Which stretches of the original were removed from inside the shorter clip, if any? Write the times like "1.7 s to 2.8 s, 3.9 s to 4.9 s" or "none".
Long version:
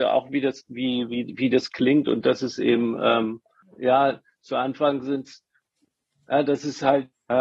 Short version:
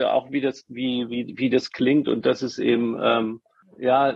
none